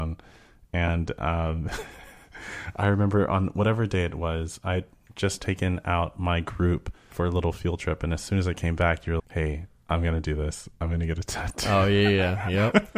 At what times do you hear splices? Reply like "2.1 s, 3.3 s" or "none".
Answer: 7.1 s, 9.2 s